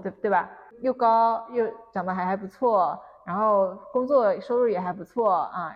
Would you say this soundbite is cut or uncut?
uncut